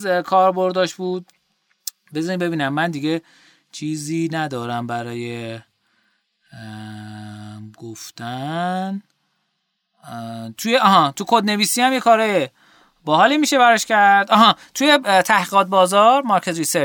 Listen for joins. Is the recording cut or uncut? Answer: uncut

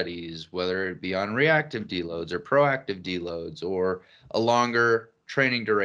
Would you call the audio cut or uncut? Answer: uncut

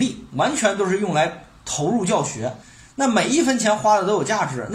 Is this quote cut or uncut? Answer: uncut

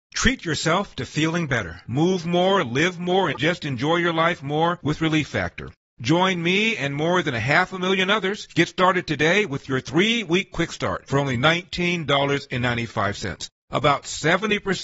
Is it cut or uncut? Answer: uncut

